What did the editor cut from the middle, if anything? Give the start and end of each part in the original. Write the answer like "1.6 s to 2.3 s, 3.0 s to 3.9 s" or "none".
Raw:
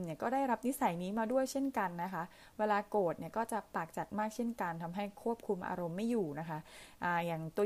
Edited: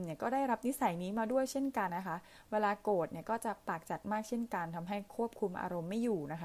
1.9 s to 2.0 s